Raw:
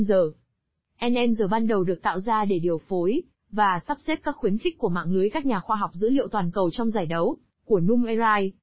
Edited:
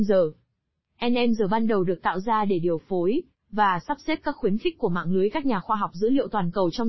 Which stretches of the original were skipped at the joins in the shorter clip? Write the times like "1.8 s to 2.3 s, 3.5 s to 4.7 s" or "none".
none